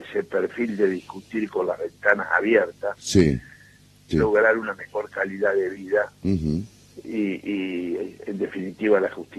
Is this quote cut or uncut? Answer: cut